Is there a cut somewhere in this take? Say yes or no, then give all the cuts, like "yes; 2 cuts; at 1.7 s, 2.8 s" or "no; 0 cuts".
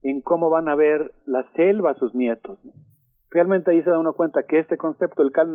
no; 0 cuts